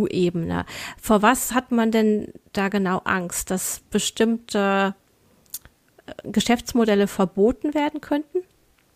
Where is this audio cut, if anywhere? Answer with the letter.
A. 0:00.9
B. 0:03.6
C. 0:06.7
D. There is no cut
D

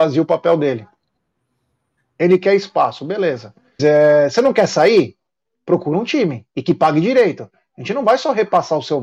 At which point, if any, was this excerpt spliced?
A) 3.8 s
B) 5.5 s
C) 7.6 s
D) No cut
A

